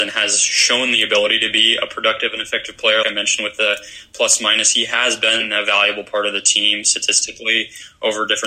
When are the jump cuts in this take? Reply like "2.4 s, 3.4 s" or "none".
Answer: 3.0 s